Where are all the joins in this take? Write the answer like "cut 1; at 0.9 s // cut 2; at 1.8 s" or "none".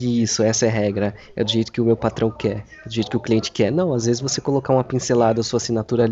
none